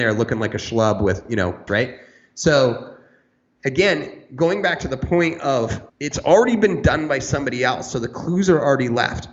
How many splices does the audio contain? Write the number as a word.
two